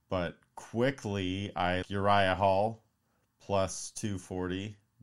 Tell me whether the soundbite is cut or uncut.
cut